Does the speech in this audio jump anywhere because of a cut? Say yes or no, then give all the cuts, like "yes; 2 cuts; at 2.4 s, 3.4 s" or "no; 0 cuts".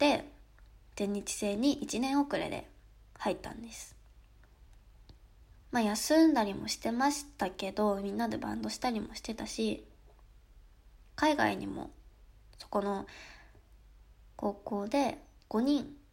yes; 1 cut; at 5.6 s